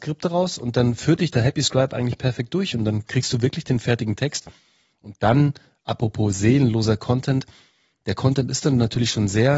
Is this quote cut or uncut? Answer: uncut